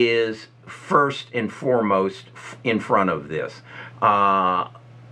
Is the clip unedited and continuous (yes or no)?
no